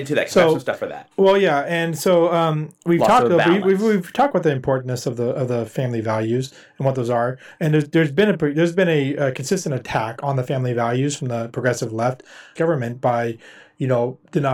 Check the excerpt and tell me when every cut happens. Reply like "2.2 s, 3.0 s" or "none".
12.6 s

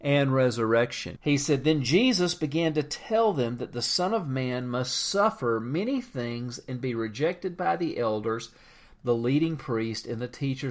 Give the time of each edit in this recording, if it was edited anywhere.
1.2 s

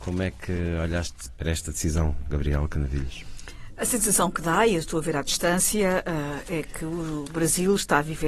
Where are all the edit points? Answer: none

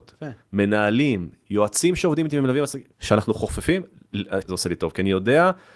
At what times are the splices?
2.9 s, 4.4 s

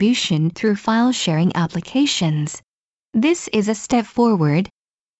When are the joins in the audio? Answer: 3.0 s

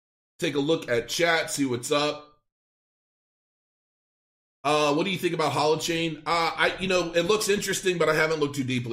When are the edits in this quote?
none

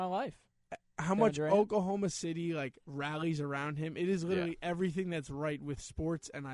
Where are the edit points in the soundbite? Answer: none

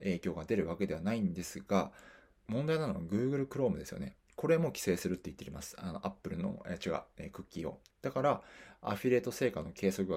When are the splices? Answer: 2.4 s, 7.9 s

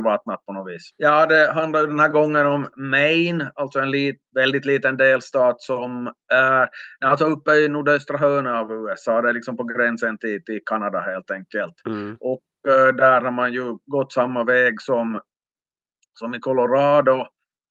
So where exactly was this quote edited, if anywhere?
0.9 s

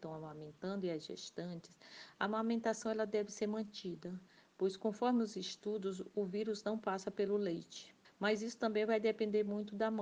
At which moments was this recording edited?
8.0 s

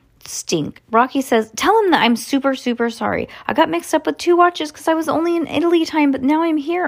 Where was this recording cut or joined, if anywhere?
none

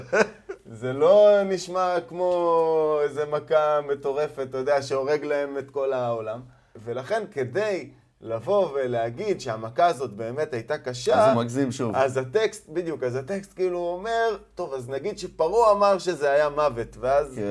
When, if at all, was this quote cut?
none

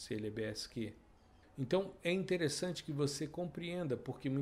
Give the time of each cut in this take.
1.4 s

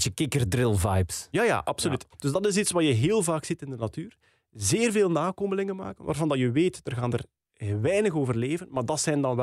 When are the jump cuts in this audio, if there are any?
2.1 s

